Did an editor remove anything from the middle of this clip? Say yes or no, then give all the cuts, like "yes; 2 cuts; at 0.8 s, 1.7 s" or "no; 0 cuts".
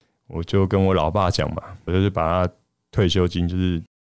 yes; 1 cut; at 1.9 s